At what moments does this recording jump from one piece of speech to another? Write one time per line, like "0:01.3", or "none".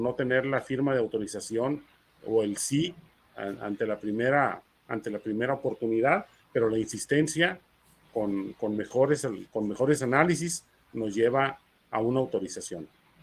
0:06.4